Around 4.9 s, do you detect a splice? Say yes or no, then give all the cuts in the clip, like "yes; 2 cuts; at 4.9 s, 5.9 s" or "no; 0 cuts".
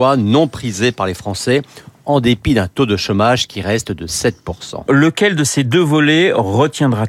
yes; 1 cut; at 4.9 s